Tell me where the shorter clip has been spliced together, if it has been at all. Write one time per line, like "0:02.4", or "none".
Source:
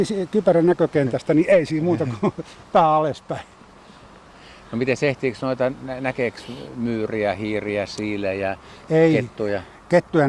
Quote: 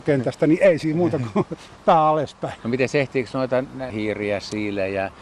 0:02.6
0:03.9